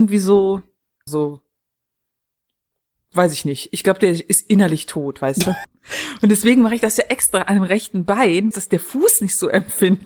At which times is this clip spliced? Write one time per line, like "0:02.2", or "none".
0:01.1
0:05.6
0:08.5